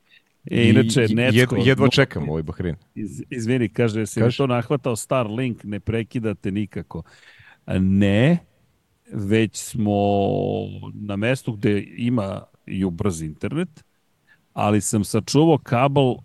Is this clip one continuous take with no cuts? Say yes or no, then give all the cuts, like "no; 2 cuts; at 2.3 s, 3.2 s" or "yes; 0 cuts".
yes; 0 cuts